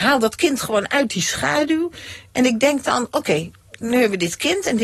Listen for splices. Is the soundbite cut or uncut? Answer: uncut